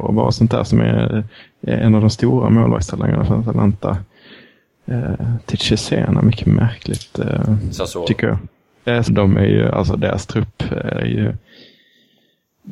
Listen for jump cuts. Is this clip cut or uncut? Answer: cut